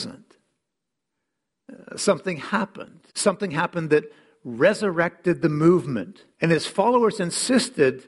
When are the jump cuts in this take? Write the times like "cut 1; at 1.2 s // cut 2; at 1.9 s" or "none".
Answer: cut 1; at 3.1 s // cut 2; at 6.3 s